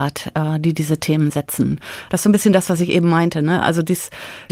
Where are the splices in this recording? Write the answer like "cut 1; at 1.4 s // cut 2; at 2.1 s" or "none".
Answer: cut 1; at 2.1 s